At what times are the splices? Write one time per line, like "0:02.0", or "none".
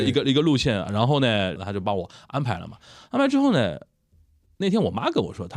0:01.6